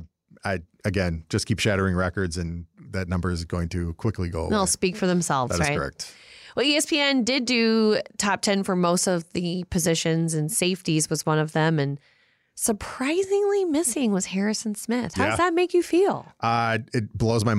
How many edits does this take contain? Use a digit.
0